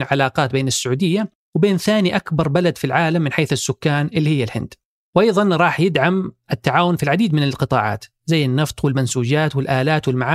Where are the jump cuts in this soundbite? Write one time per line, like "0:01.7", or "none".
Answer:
none